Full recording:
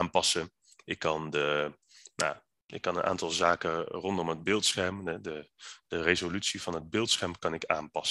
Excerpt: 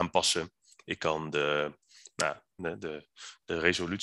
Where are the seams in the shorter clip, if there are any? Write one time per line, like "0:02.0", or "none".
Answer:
0:02.6